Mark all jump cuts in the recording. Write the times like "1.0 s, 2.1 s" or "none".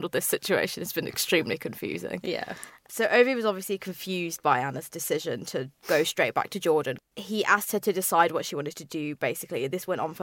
none